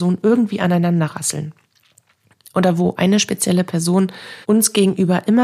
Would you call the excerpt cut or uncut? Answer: cut